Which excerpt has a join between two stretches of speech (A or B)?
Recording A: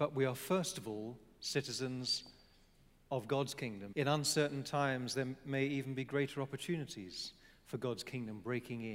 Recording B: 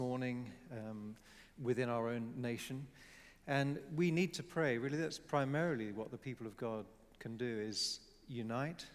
A